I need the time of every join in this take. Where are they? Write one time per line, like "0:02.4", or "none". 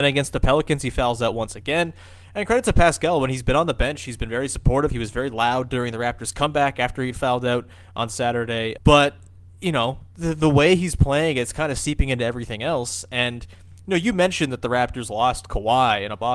0:08.8

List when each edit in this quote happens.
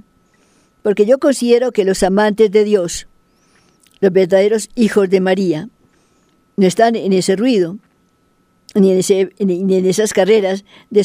none

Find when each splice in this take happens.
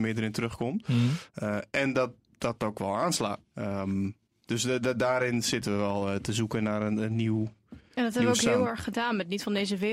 0:03.4

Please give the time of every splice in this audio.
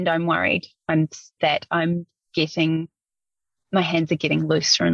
0:01.4

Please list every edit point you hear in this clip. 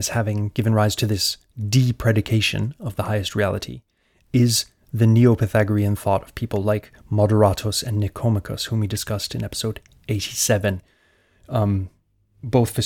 none

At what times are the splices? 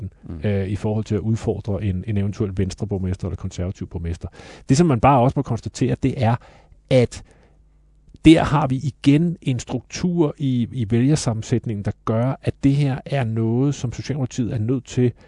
none

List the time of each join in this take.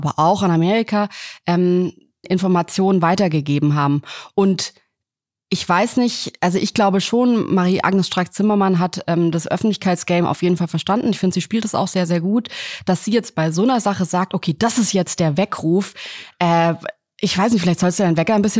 0:02.2

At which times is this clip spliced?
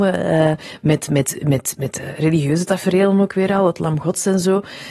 none

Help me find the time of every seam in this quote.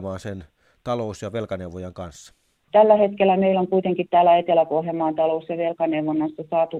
0:02.7

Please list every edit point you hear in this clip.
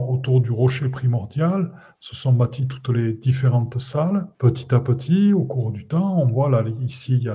0:04.3

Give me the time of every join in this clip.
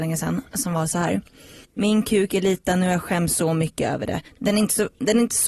0:01.6
0:04.3

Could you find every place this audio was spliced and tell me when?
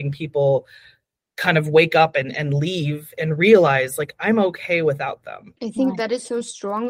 0:05.6

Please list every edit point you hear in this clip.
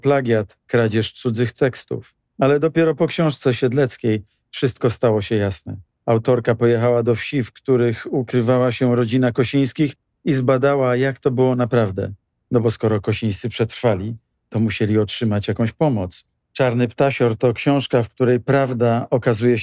0:16.4

